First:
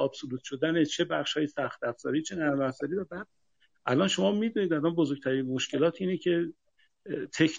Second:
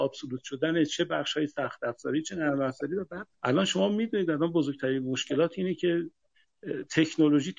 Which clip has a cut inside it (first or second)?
second